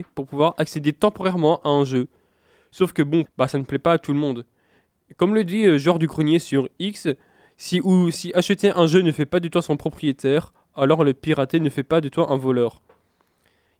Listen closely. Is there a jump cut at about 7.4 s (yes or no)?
no